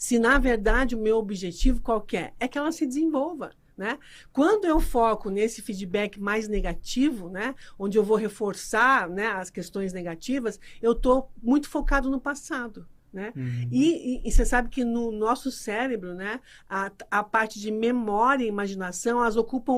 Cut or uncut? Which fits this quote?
uncut